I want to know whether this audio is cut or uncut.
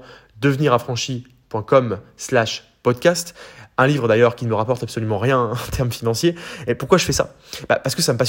uncut